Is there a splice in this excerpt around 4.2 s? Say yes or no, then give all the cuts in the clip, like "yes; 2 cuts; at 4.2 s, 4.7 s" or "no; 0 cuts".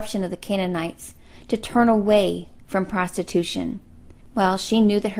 yes; 1 cut; at 4.2 s